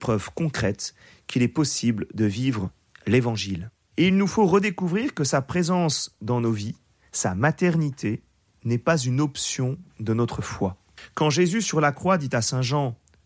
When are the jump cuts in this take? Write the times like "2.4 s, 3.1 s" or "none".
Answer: 3.9 s